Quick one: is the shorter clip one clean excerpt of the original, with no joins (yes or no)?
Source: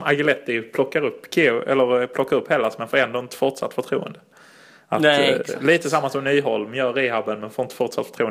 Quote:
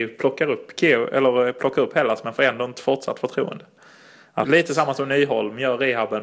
no